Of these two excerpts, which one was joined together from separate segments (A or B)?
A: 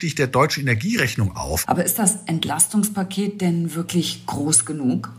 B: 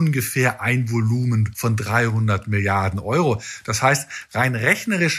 A